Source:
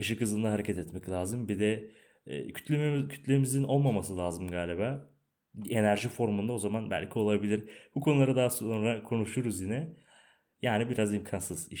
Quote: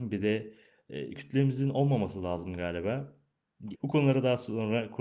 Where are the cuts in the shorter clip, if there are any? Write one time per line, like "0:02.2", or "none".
0:01.1
0:03.7